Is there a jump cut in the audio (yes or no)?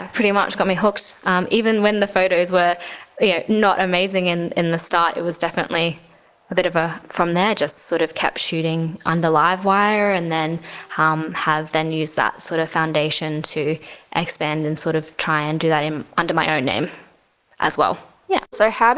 yes